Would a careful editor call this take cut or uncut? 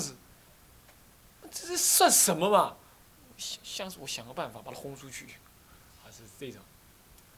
uncut